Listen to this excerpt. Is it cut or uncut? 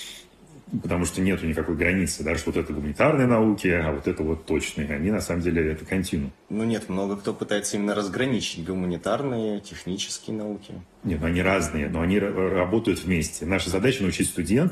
uncut